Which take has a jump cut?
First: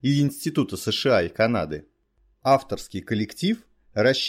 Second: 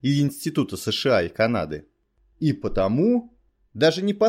first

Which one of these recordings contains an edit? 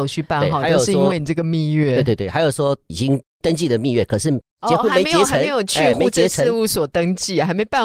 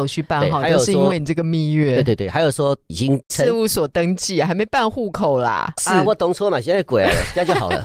second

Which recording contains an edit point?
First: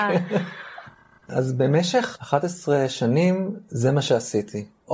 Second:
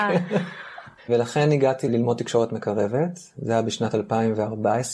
second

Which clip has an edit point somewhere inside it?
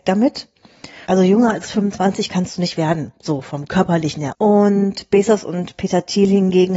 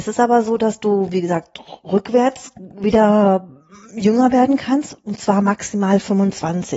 first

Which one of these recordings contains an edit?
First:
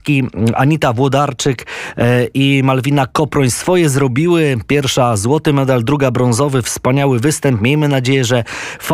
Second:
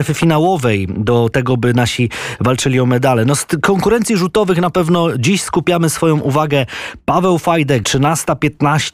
second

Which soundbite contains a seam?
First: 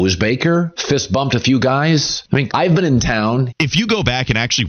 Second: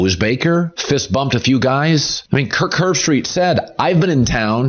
first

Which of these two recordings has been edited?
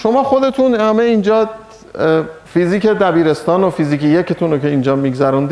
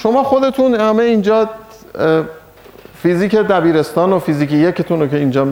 first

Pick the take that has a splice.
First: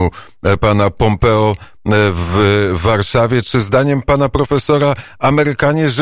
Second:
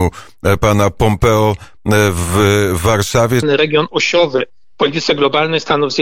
second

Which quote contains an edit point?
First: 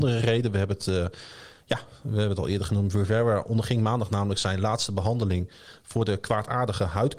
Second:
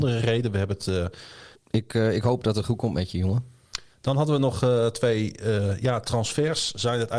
second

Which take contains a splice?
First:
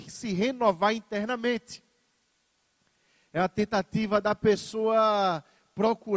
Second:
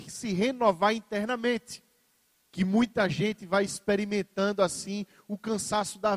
second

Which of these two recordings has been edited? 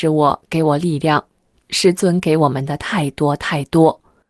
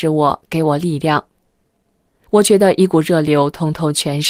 first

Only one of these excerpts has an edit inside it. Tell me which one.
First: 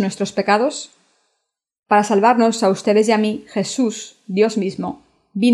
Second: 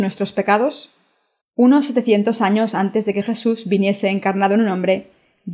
second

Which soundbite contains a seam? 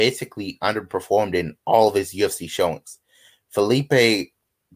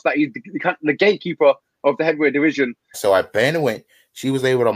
second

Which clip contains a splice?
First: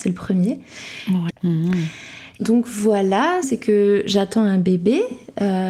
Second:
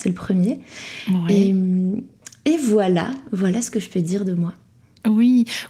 first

